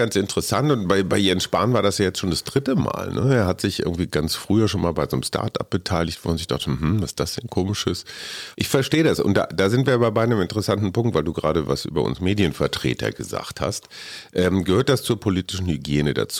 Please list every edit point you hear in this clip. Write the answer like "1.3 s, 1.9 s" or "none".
8.5 s